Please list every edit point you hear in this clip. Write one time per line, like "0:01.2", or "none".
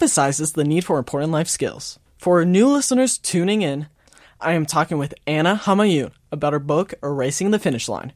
0:02.1